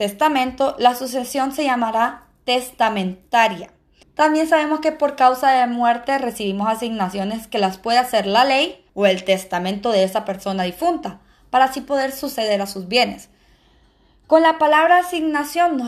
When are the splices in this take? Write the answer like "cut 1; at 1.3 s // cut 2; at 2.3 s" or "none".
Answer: cut 1; at 4.0 s // cut 2; at 8.9 s